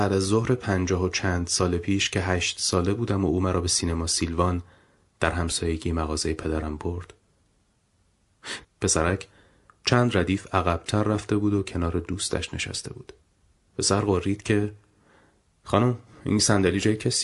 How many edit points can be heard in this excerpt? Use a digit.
2